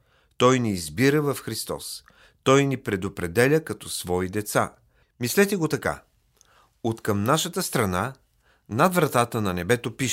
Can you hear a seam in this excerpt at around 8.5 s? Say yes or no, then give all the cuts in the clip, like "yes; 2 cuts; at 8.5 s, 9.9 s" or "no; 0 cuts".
no; 1 cut; at 5.0 s